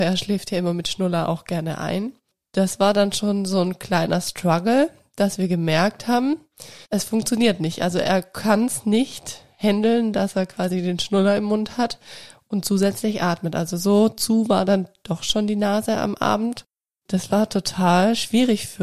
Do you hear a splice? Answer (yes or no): yes